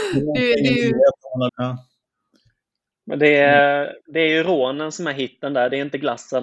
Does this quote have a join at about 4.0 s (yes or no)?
no